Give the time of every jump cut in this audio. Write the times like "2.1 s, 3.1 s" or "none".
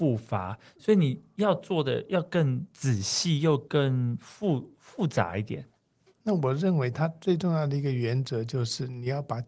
6.1 s